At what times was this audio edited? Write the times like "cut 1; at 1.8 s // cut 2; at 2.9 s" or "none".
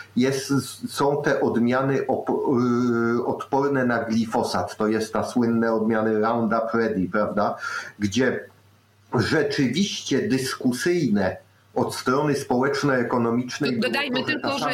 none